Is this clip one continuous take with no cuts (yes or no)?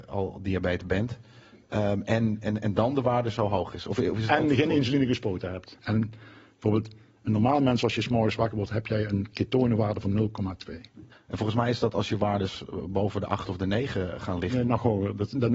no